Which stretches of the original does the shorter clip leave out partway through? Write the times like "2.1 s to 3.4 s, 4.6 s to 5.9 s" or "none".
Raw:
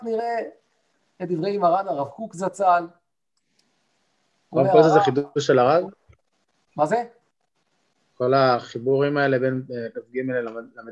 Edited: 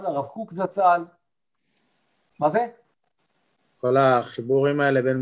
4.1 s to 6.7 s